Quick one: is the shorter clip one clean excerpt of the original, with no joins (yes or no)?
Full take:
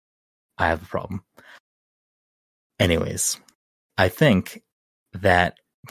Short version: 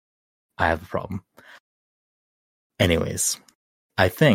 yes